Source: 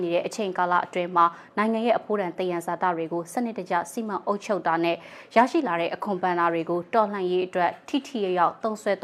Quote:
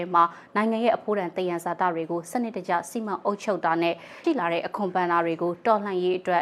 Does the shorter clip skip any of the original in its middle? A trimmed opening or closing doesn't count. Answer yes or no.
yes